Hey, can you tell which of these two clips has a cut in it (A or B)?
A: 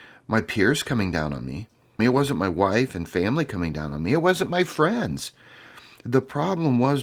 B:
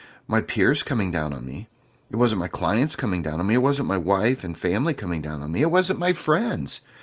A